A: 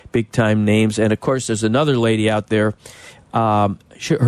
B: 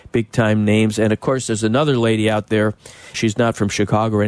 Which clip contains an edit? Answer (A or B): B